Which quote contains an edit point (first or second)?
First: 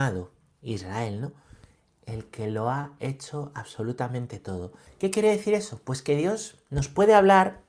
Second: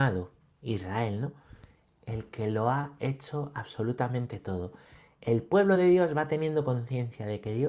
first